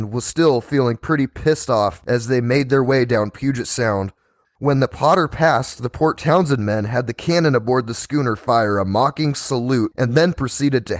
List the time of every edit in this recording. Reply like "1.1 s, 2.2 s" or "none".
4.4 s